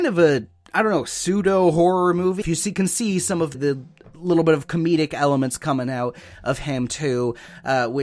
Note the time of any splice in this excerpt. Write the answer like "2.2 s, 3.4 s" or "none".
2.4 s, 3.5 s